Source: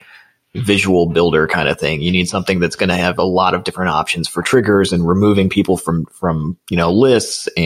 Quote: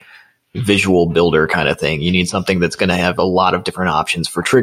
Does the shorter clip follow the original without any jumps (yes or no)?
yes